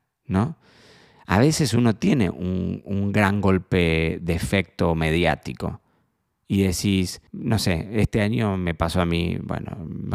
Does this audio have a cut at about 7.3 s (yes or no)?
yes